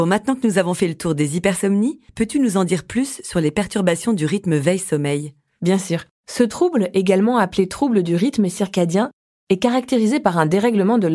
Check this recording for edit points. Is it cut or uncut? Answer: cut